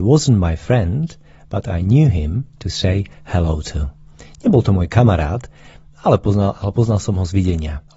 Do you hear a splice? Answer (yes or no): no